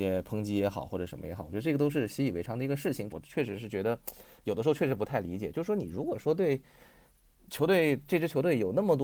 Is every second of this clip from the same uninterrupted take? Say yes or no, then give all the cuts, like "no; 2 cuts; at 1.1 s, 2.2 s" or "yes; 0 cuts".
no; 1 cut; at 3.1 s